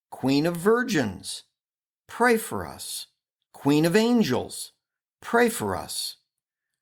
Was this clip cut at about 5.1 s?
no; 1 cut; at 3.5 s

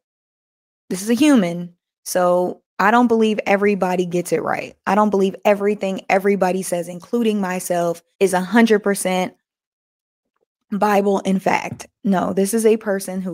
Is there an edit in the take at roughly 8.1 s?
yes; 1 cut; at 8.1 s

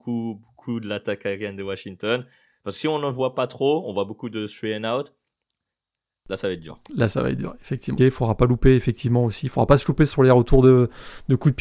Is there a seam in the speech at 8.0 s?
yes; 2 cuts; at 6.8 s, 8.0 s

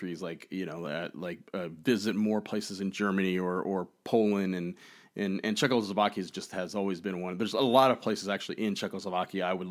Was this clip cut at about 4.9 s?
no; 0 cuts

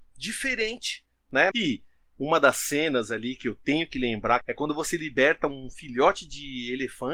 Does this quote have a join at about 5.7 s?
no; 2 cuts; at 1.5 s, 4.4 s

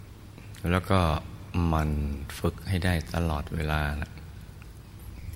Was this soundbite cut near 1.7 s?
no; 0 cuts

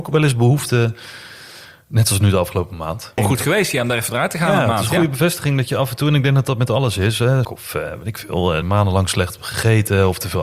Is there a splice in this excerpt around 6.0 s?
no; 3 cuts; at 3.2 s, 7.4 s, 8.6 s

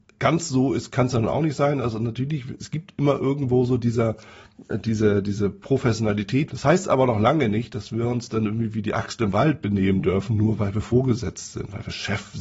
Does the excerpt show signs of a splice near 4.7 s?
no; 1 cut; at 6.5 s

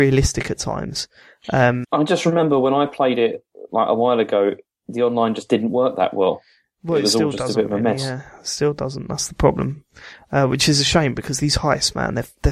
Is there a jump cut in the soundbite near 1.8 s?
yes; 1 cut; at 1.8 s

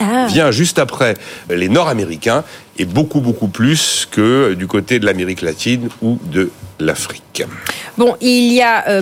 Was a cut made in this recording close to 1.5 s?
yes; 1 cut; at 1.5 s

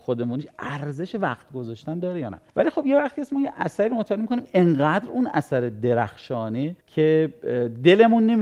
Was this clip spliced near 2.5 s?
yes; 2 cuts; at 2.5 s, 6.8 s

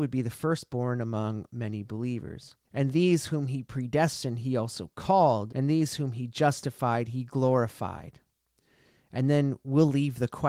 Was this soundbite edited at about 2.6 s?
yes; 2 cuts; at 2.6 s, 5.5 s

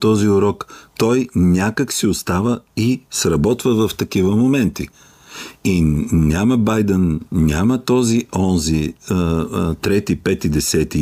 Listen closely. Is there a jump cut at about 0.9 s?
yes; 2 cuts; at 0.9 s, 7.3 s

